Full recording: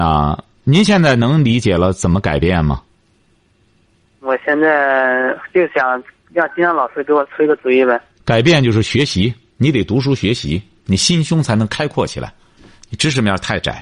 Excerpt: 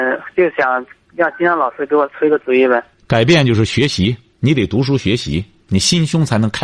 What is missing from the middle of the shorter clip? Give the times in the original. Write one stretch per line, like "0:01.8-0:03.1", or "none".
none